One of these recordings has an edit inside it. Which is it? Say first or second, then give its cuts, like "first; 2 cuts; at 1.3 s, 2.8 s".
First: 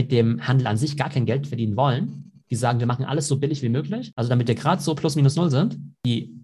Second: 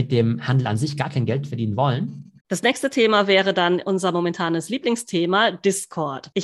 second; 1 cut; at 2.4 s